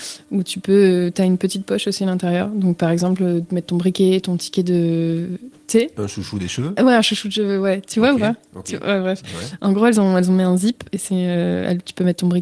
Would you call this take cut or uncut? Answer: uncut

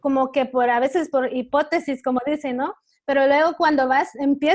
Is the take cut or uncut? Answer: uncut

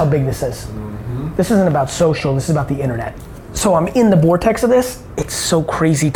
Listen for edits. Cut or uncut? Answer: uncut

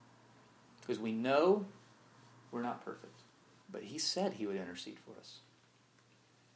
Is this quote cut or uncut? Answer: cut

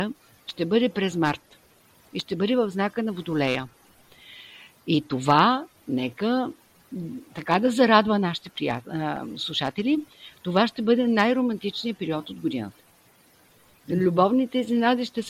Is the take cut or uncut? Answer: uncut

